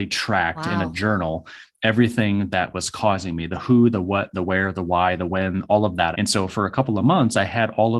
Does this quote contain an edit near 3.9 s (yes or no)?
no